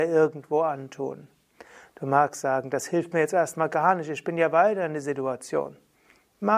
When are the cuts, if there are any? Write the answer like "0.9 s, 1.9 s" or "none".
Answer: none